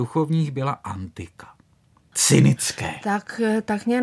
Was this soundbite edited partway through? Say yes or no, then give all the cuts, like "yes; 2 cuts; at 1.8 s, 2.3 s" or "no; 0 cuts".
yes; 1 cut; at 2.1 s